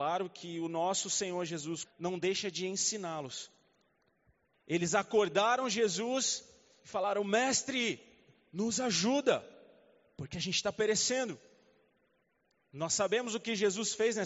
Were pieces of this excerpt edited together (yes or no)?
yes